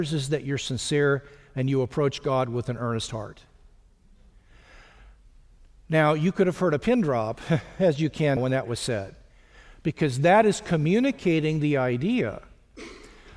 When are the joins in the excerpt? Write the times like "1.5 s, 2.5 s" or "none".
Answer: 8.4 s

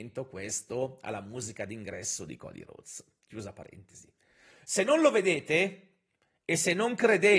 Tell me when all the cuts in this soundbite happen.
none

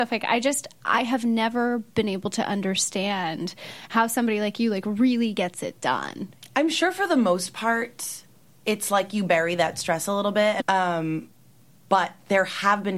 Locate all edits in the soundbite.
10.6 s

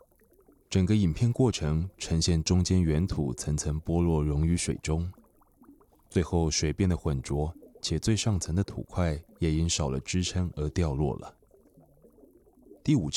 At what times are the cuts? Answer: none

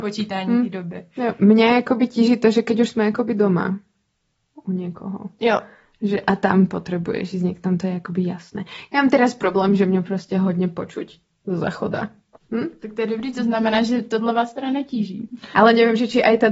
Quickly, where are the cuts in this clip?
12.4 s, 15.5 s

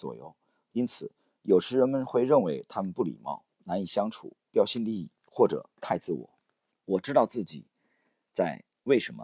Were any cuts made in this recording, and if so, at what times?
6.7 s

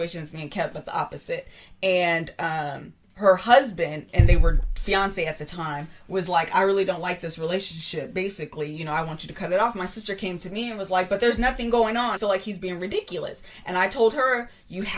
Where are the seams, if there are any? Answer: 3.0 s, 12.2 s

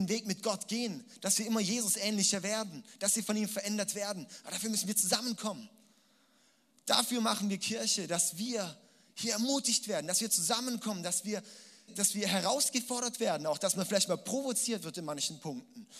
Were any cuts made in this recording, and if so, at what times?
11.9 s

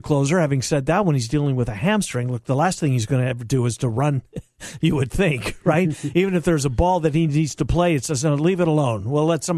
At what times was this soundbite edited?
none

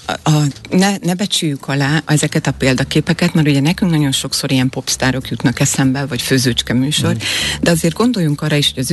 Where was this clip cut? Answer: none

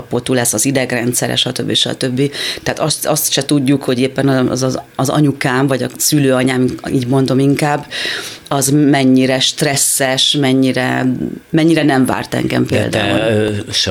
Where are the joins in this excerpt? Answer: none

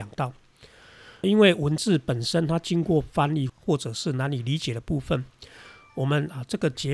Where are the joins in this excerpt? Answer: 1.2 s, 3.5 s

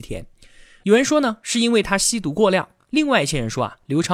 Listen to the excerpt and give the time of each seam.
none

